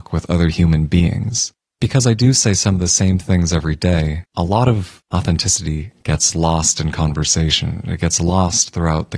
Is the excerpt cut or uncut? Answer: uncut